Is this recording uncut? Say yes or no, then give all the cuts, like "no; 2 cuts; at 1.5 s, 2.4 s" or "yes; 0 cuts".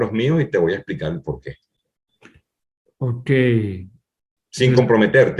yes; 0 cuts